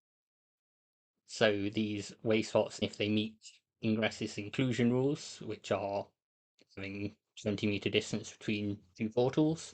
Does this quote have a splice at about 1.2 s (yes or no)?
no